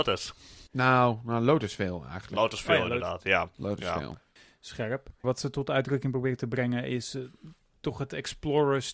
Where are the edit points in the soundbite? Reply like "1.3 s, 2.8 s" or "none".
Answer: 5.2 s